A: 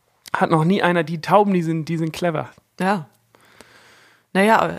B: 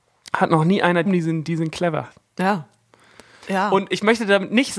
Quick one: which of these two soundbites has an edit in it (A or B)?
B